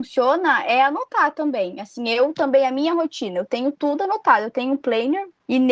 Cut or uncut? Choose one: uncut